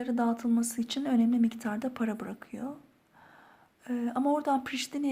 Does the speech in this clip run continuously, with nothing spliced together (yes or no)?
yes